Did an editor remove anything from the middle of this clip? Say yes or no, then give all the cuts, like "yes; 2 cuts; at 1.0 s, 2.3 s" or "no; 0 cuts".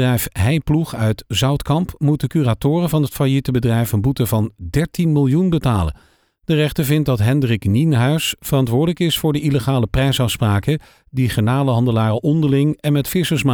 no; 0 cuts